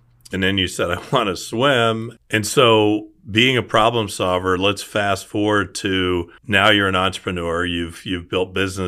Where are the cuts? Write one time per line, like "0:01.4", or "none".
0:02.2
0:06.4

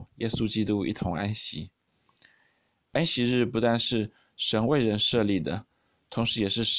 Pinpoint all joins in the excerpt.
none

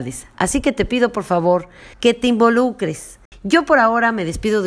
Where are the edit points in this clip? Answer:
0:01.9
0:03.3

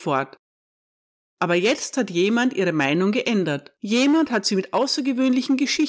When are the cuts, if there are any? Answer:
0:03.8

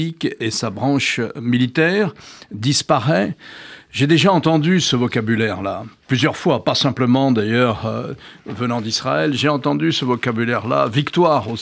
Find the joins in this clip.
none

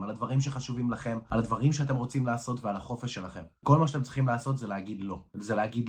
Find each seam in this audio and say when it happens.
none

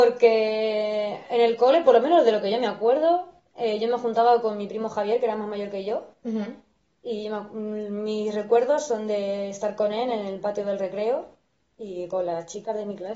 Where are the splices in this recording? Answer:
none

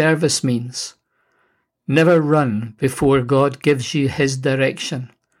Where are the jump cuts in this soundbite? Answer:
none

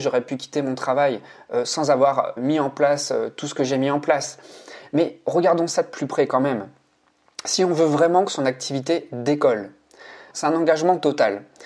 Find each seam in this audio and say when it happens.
0:02.4
0:10.3

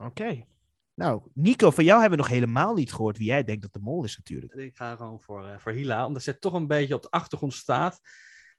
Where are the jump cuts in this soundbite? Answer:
0:04.5

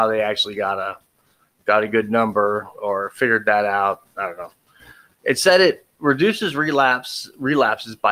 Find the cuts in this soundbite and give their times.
none

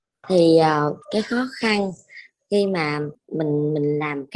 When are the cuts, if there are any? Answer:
0:01.0

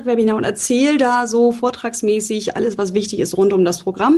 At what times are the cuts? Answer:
none

